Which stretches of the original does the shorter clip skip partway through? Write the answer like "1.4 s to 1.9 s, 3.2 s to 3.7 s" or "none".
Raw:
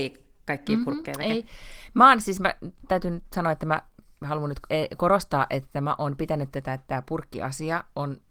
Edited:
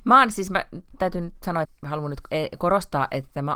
3.5 s to 4.0 s